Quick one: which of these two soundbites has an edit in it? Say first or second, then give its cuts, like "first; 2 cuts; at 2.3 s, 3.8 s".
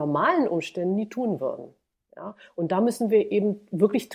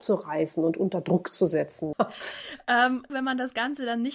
second; 2 cuts; at 1.9 s, 3.1 s